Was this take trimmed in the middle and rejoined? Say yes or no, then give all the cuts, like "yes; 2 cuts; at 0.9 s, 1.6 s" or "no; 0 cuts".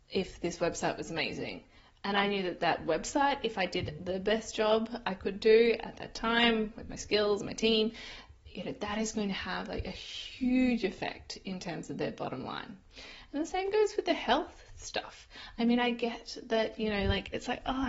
no; 0 cuts